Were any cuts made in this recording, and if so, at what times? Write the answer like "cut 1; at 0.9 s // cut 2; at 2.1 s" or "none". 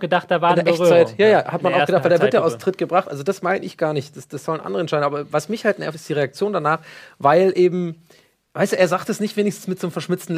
none

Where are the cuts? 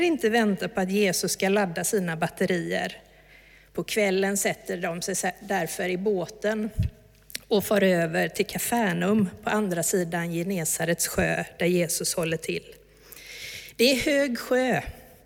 none

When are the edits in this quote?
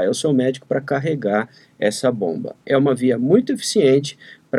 none

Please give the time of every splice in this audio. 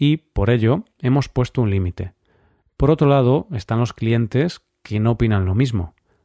cut 1; at 2.6 s

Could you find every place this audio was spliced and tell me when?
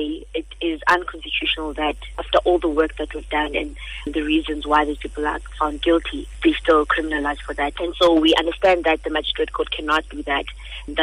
cut 1; at 7.7 s

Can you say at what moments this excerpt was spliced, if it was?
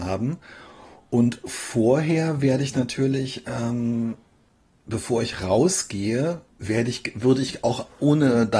none

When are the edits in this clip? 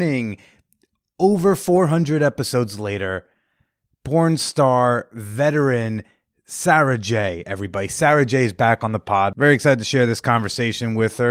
none

